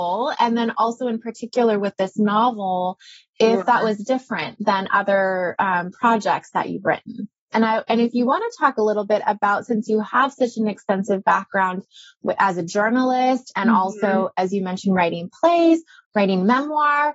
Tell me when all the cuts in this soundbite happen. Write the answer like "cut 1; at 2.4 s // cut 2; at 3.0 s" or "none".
cut 1; at 7.5 s